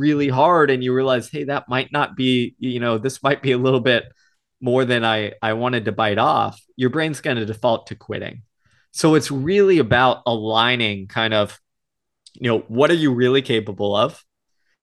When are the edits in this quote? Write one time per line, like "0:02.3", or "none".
none

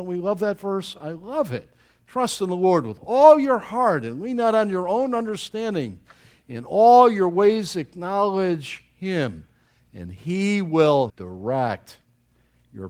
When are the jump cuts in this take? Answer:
0:11.1

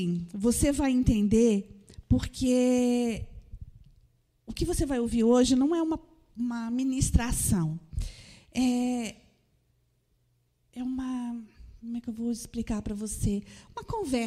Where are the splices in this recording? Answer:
none

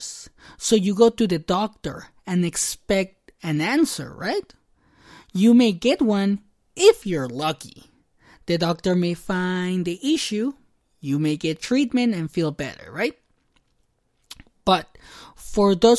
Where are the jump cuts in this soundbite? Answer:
none

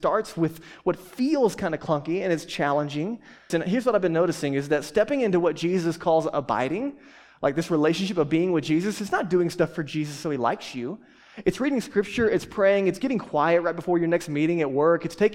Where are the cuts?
0:03.5

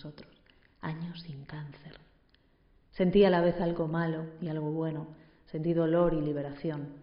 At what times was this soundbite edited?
none

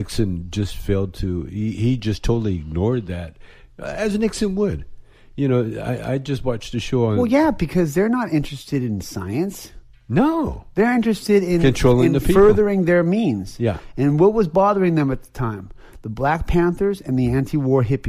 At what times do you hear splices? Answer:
none

